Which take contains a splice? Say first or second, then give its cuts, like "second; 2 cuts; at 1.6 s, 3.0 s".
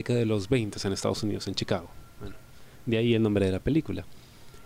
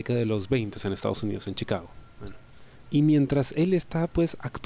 second; 1 cut; at 2.8 s